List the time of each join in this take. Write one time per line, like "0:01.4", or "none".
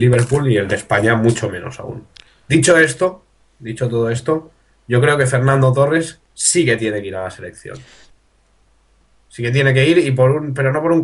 none